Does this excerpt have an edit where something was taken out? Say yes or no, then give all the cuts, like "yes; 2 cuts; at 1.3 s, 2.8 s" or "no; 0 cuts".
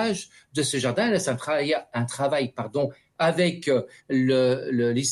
no; 0 cuts